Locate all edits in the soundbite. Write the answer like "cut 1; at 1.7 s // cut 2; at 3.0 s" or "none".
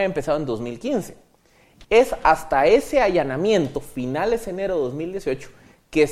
cut 1; at 1.8 s